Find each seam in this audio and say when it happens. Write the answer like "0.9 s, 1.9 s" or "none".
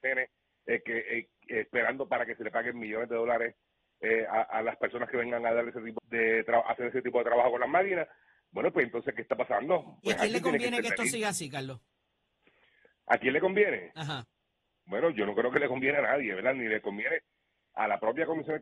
6.0 s